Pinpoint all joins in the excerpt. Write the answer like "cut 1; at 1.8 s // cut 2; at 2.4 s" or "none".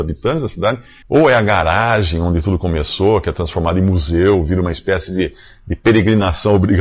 cut 1; at 1.0 s

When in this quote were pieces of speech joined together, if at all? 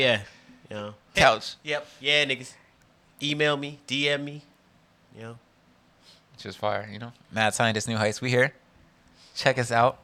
cut 1; at 1.1 s

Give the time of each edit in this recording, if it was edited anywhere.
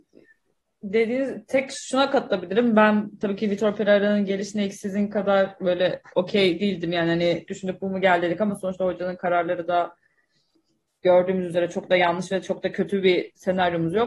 cut 1; at 7.5 s

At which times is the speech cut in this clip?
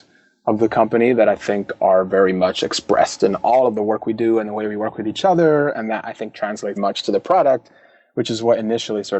cut 1; at 6.8 s

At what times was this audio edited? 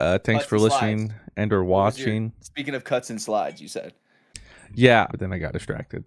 cut 1; at 5.1 s

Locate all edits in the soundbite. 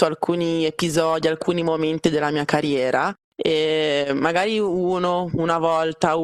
none

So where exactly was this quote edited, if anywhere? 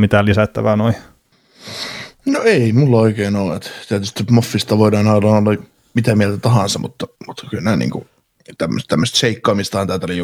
none

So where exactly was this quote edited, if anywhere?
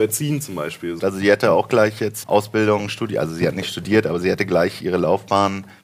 cut 1; at 1.0 s // cut 2; at 2.2 s

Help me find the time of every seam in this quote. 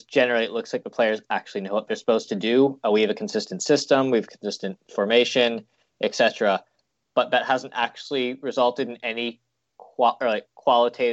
none

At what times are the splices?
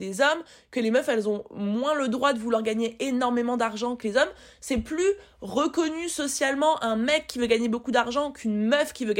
none

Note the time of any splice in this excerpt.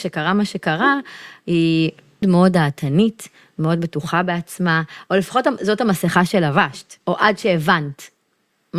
cut 1; at 2.2 s // cut 2; at 7.0 s

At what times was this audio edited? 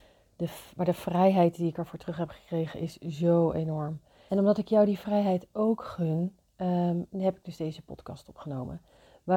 cut 1; at 4.3 s

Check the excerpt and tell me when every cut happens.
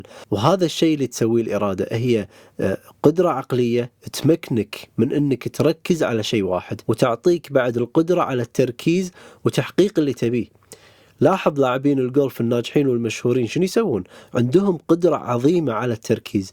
cut 1; at 6.8 s

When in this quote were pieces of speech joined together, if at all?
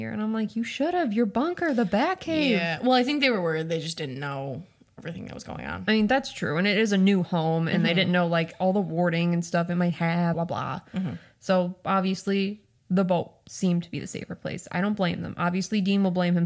cut 1; at 10.3 s

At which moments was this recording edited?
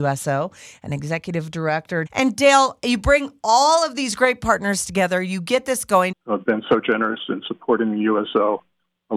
cut 1; at 2.1 s // cut 2; at 6.1 s

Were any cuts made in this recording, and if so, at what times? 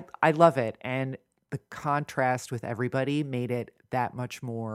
none

